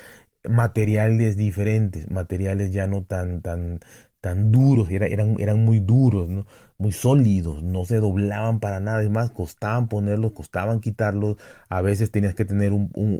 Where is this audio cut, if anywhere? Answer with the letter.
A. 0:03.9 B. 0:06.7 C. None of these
C